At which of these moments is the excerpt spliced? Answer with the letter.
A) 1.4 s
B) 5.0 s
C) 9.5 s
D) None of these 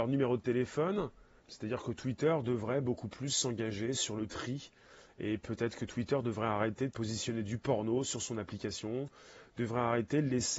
A